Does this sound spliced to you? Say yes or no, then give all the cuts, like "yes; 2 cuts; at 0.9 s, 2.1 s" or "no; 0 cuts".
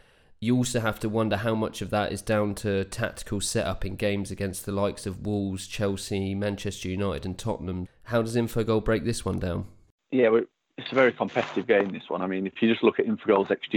yes; 1 cut; at 7.9 s